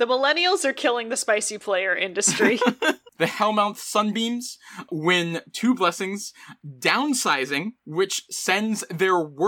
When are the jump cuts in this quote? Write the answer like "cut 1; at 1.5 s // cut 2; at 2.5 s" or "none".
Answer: cut 1; at 7.8 s